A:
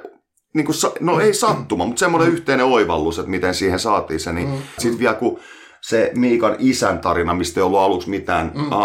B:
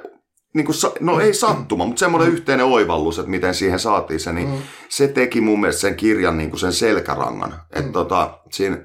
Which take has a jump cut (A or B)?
A